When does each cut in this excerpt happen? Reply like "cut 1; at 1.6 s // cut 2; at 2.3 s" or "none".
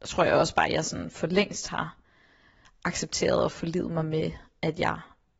none